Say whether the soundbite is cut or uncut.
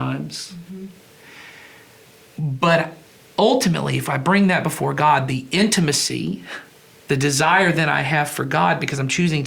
uncut